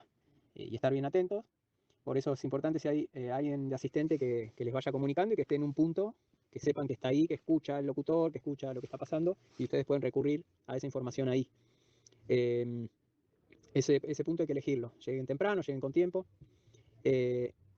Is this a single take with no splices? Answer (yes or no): yes